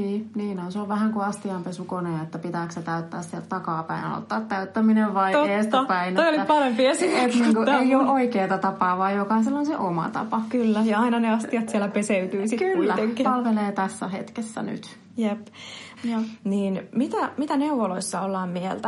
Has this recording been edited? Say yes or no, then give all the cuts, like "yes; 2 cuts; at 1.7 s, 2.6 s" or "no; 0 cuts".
yes; 2 cuts; at 13.2 s, 16.0 s